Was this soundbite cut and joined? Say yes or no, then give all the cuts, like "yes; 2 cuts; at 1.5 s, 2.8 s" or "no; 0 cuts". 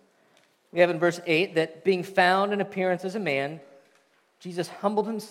no; 0 cuts